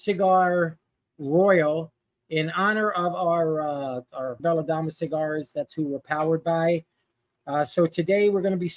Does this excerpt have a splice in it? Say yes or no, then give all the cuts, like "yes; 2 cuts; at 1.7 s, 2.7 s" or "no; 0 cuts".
yes; 1 cut; at 4.4 s